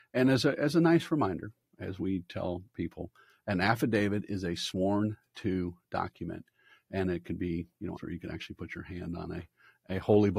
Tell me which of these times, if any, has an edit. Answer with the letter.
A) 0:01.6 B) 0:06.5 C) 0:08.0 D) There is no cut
C